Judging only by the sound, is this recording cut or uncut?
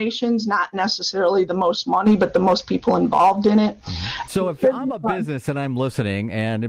cut